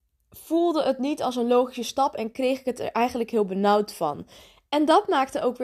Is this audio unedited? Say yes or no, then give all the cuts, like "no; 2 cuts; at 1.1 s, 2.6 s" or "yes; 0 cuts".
yes; 0 cuts